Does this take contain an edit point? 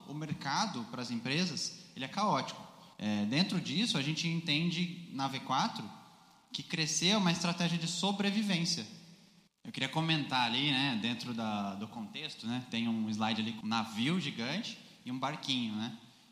yes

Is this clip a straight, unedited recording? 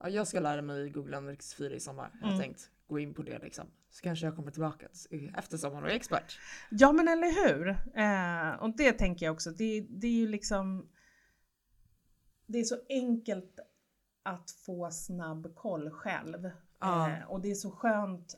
yes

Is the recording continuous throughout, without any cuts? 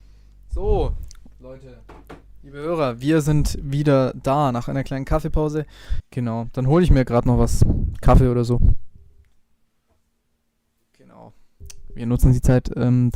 no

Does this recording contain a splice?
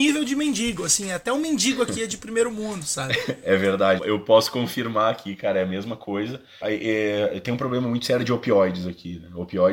yes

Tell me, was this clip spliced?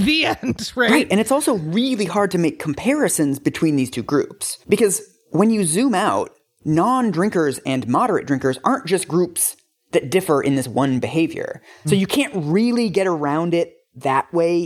yes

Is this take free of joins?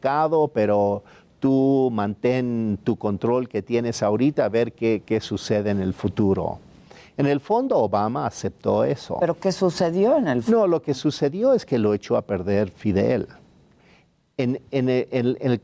yes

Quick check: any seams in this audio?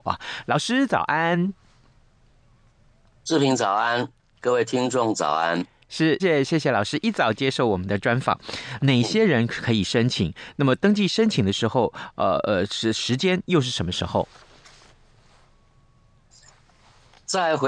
yes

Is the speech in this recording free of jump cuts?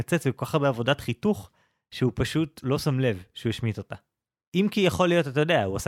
no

